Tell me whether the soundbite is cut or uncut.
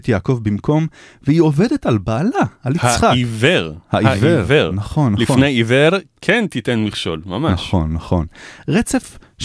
uncut